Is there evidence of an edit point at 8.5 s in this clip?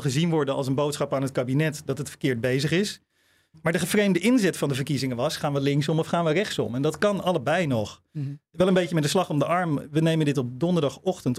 no; 0 cuts

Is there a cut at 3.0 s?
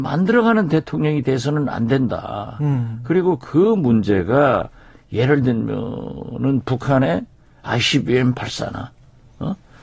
no; 0 cuts

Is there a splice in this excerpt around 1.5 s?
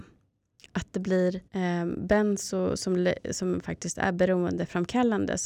yes; 1 cut; at 1.5 s

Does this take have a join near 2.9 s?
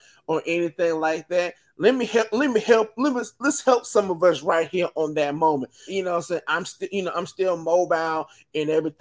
no; 1 cut; at 5.9 s

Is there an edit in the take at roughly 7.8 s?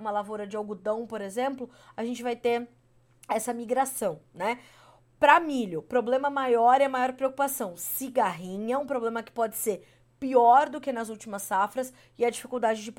no; 0 cuts

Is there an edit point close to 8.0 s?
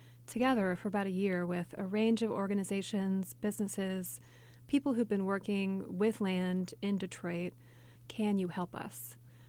yes; 1 cut; at 8.0 s

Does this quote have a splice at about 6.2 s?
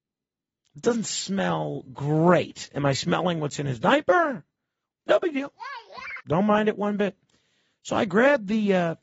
yes; 2 cuts; at 4.9 s, 6.2 s

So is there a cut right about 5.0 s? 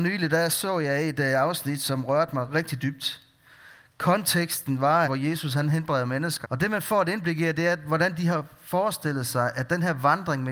yes; 2 cuts; at 5.0 s, 6.4 s

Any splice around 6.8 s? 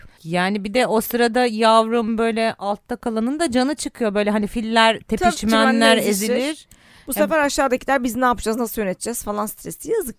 no; 1 cut; at 5.3 s

